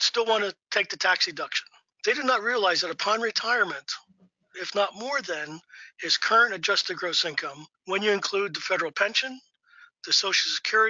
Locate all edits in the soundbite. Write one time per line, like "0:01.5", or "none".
0:01.9
0:04.5
0:07.7

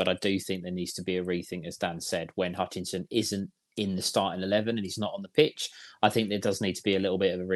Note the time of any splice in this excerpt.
none

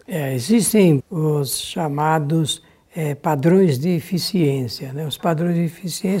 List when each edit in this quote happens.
0:01.0

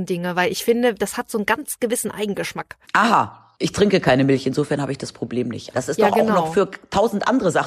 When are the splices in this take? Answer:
0:02.8
0:05.7

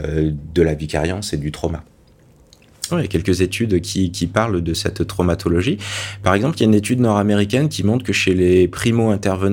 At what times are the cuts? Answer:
0:02.9

